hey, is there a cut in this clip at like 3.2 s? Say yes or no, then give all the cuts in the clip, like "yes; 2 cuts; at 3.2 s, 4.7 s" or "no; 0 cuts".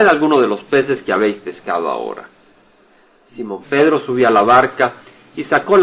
no; 0 cuts